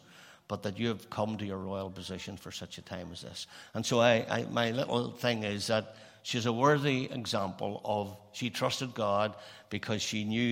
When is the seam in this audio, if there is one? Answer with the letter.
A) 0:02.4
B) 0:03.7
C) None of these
C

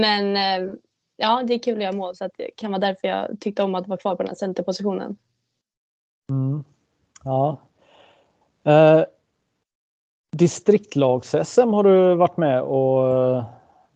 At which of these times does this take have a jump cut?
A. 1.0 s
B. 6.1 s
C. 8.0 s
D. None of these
D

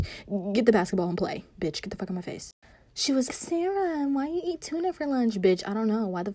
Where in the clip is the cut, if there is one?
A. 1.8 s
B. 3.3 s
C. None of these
B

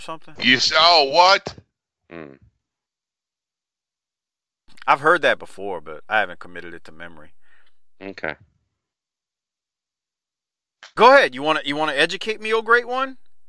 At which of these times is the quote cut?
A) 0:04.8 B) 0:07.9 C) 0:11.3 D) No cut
A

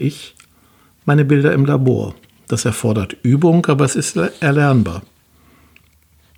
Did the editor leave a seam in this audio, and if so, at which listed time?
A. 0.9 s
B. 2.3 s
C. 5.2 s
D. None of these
D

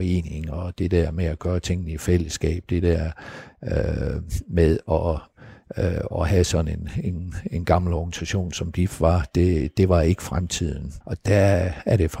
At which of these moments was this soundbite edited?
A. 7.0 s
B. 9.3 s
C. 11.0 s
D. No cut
C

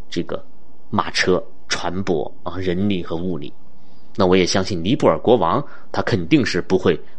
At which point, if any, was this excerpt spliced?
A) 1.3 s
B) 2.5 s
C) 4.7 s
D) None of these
D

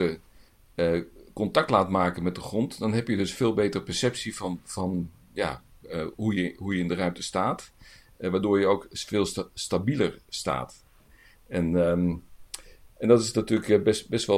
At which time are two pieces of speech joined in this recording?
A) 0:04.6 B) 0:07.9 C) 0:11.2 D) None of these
D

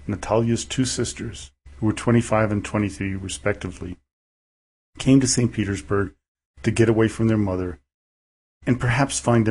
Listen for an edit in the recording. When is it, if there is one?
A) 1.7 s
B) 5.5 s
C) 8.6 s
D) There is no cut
A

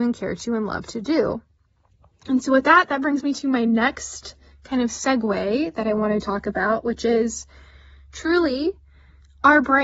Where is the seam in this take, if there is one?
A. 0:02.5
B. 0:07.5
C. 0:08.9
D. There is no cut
D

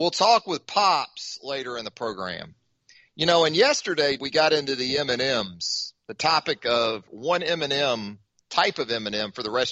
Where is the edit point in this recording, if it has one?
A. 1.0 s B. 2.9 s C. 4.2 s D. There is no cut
C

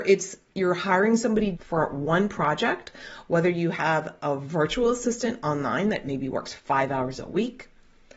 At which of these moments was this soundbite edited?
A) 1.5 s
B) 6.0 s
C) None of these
A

